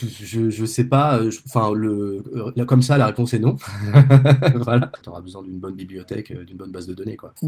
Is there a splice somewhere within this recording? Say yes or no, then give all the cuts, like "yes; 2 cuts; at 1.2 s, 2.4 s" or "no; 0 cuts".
yes; 1 cut; at 5.0 s